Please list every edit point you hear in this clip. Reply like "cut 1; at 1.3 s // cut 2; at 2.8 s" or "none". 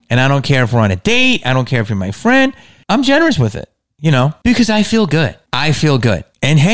cut 1; at 4.4 s